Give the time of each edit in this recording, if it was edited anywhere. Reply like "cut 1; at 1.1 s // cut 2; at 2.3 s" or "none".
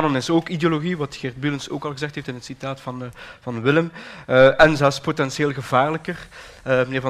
none

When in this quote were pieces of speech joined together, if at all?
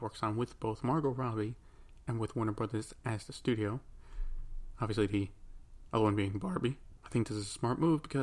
cut 1; at 7.0 s

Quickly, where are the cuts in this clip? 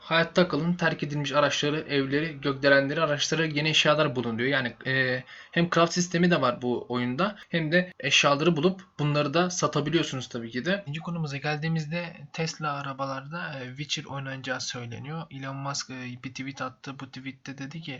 cut 1; at 10.9 s

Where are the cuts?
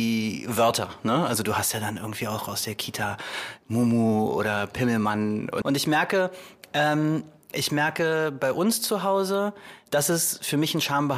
cut 1; at 5.6 s

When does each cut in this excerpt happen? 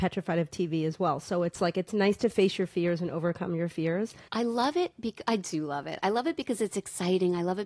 cut 1; at 4.3 s

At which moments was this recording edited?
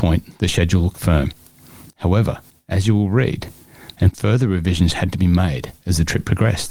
cut 1; at 3.9 s

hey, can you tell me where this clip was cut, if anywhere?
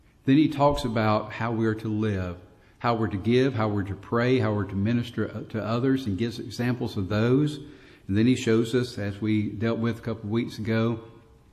none

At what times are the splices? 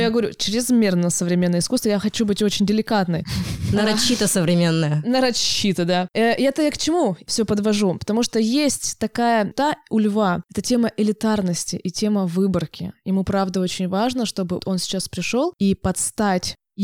cut 1; at 9.5 s // cut 2; at 14.6 s

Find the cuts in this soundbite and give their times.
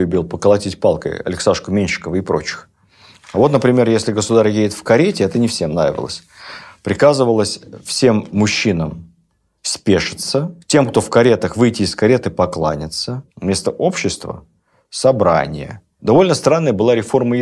cut 1; at 3.2 s // cut 2; at 13.3 s // cut 3; at 16.0 s

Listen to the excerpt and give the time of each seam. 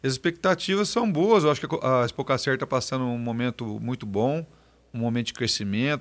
none

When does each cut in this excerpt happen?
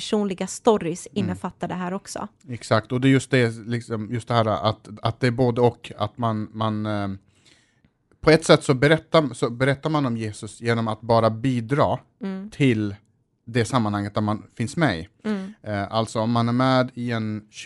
none

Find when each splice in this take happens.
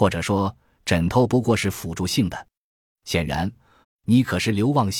cut 1; at 3.8 s

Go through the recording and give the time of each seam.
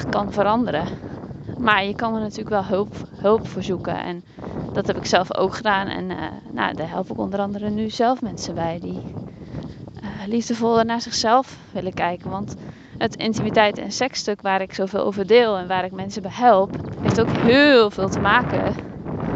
cut 1; at 1.6 s // cut 2; at 16.9 s

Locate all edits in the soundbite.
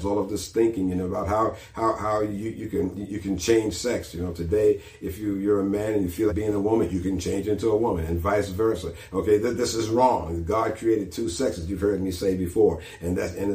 cut 1; at 6.3 s

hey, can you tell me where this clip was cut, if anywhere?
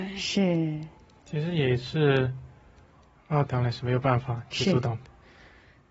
cut 1; at 1.2 s // cut 2; at 3.5 s

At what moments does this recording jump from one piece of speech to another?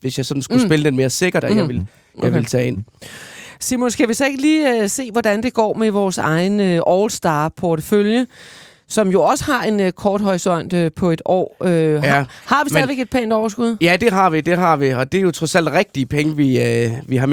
cut 1; at 1.4 s

